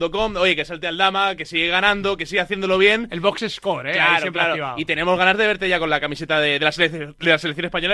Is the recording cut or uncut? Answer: uncut